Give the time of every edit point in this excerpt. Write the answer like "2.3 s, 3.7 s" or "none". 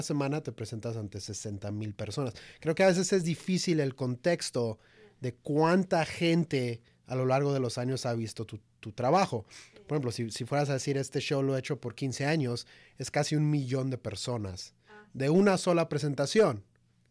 none